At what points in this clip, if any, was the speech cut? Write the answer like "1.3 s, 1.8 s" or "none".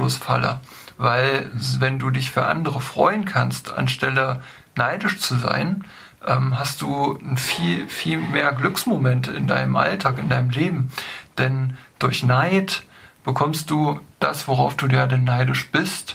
0.9 s